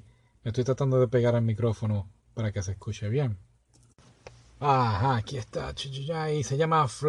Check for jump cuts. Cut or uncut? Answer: uncut